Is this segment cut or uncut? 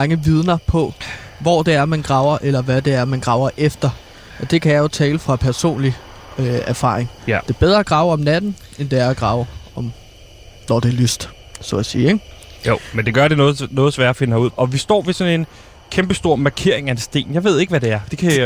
cut